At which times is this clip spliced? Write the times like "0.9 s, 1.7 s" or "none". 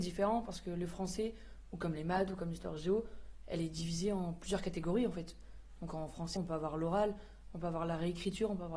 6.4 s